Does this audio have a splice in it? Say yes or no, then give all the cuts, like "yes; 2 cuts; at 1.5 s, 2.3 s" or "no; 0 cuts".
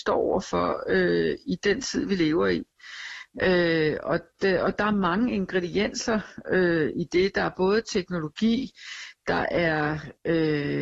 no; 0 cuts